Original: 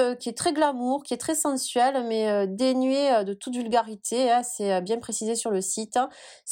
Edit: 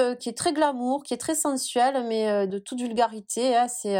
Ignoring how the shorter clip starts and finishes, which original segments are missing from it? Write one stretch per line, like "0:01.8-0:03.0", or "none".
0:02.5-0:03.2